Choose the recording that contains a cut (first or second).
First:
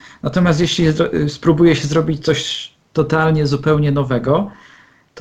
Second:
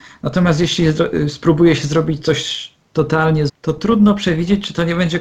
second